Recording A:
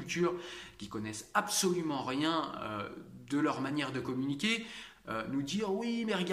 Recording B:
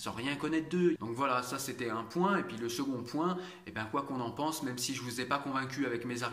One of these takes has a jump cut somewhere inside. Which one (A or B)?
B